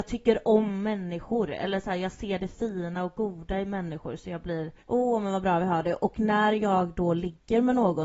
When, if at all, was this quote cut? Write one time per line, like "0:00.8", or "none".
0:04.8